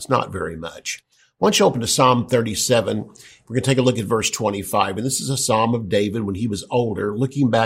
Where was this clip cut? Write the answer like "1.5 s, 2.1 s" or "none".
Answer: none